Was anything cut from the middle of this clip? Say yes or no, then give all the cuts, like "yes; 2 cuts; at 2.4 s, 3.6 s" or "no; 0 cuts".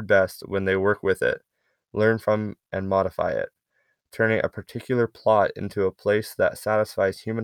no; 0 cuts